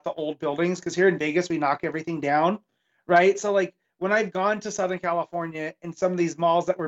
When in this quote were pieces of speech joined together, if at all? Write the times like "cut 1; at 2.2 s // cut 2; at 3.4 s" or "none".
none